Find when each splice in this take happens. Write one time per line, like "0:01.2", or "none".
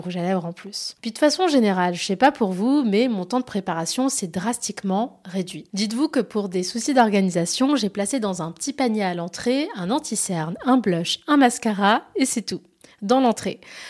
none